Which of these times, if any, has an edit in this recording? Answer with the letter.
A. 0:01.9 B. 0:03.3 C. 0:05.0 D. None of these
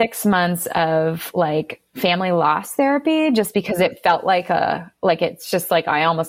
A